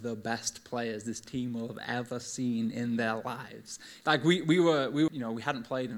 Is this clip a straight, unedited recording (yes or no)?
no